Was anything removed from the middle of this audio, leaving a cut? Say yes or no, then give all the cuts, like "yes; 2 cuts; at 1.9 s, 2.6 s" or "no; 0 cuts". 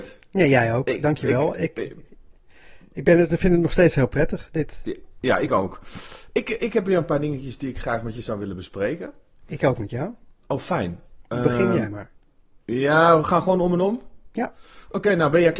no; 0 cuts